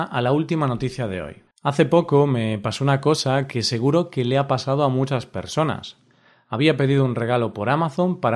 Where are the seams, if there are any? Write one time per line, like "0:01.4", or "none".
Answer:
0:01.5